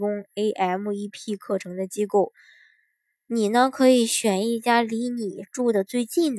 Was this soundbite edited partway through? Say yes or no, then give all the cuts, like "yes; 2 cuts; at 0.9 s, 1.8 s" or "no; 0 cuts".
no; 0 cuts